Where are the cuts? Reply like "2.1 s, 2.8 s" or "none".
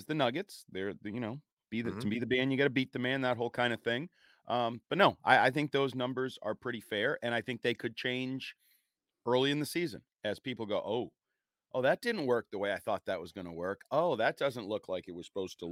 none